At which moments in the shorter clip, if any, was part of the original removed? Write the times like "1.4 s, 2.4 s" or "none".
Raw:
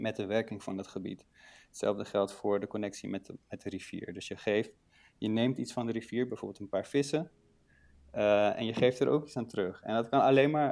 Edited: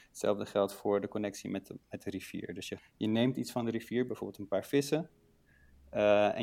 2.8 s